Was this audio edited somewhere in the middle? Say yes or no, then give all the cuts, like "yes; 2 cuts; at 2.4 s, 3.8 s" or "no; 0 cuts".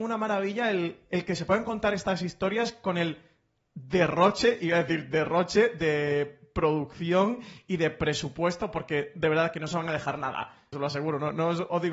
yes; 1 cut; at 10.7 s